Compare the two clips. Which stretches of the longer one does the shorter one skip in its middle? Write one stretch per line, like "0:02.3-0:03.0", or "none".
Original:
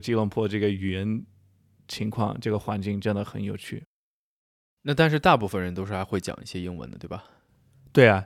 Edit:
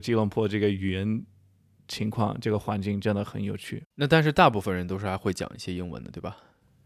0:03.9-0:04.8

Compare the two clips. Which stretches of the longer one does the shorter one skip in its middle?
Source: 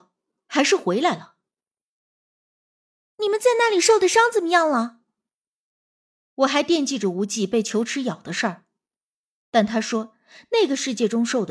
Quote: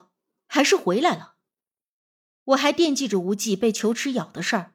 0:02.3-0:06.3

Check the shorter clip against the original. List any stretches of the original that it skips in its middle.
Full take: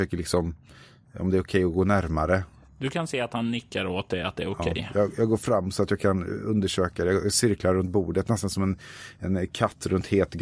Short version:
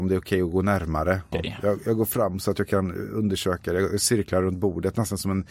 0:02.5-0:04.6

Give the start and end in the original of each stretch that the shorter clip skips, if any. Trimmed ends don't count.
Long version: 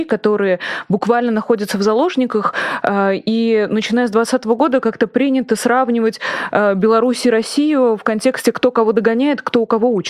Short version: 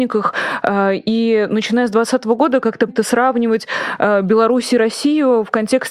0:05.1-0:05.4

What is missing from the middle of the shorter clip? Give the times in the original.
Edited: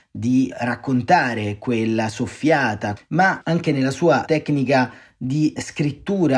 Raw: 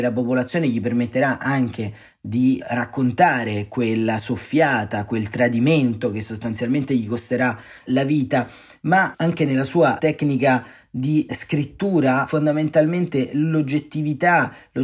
0:05.1-0:08.7

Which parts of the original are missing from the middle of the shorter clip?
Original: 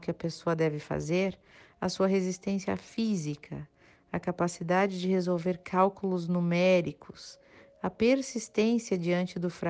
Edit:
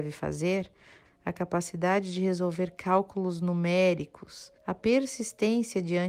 0:01.7-0:03.9
0:07.4-0:07.7

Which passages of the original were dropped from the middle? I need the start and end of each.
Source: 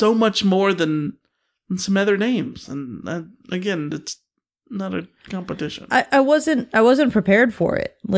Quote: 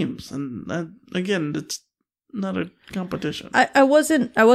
none

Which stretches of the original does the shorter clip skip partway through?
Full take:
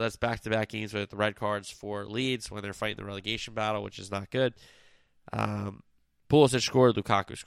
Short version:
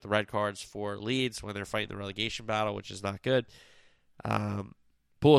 none

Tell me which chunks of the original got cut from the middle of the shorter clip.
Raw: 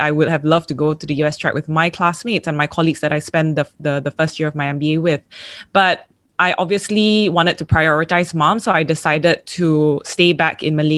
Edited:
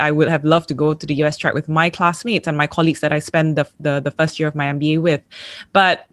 none

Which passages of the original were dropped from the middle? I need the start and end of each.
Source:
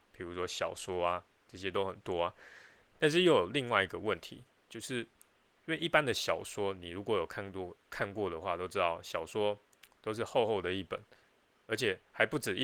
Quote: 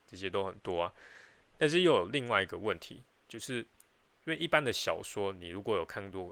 none

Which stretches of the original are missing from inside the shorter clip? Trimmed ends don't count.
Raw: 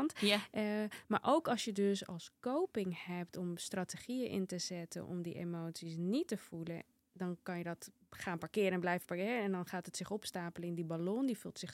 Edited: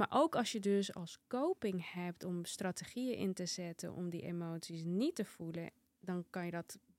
none

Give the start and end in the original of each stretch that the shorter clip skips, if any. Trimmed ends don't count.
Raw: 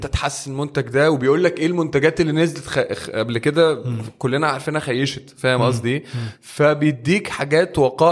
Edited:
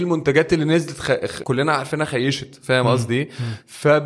0:03.1-0:04.2

